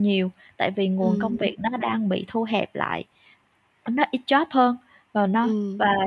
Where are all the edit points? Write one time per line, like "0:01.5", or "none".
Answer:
none